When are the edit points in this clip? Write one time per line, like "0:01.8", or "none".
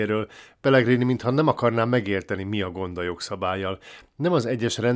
none